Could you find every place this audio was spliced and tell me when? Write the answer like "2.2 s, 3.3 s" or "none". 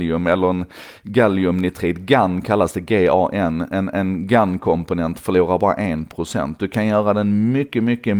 none